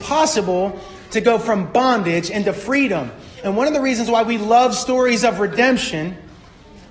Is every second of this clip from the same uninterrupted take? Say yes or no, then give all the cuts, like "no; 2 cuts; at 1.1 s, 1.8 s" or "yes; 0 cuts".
no; 1 cut; at 3.4 s